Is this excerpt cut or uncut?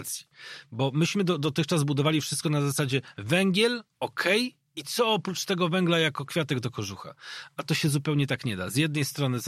uncut